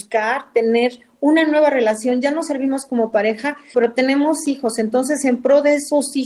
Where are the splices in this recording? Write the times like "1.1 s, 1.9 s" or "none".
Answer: 3.7 s

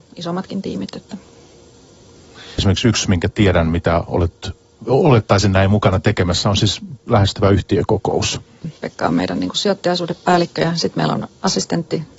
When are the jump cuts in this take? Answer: 2.6 s, 8.6 s

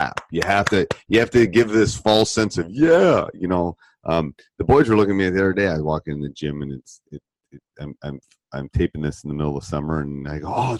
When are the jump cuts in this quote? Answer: none

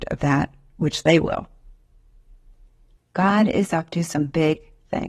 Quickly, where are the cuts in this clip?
3.0 s

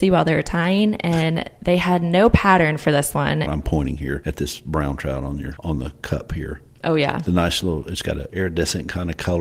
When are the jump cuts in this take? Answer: 3.4 s, 8.3 s

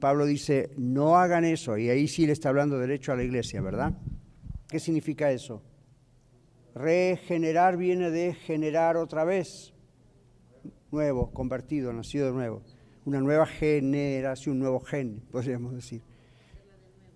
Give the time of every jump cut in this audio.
4.7 s

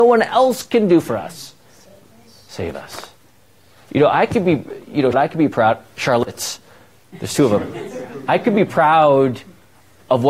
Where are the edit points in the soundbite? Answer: 5.1 s

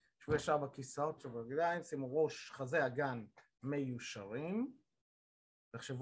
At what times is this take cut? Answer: 1.2 s

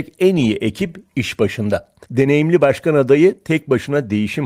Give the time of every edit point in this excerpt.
2.1 s

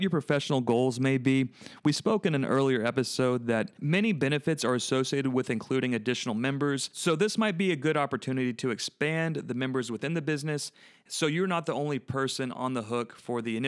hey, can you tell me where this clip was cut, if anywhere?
none

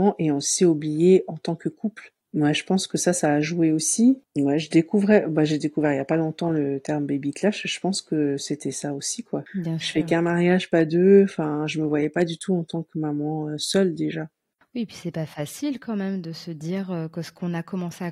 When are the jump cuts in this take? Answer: 9.5 s

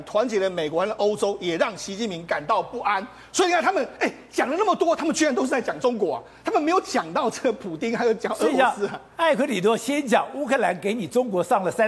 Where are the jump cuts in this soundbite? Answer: none

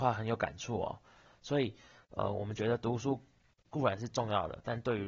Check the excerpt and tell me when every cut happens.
1.2 s

